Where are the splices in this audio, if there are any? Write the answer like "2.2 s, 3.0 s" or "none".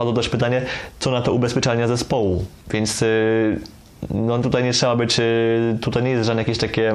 2.6 s